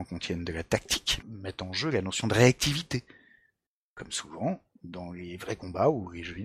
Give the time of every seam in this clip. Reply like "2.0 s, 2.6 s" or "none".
1.2 s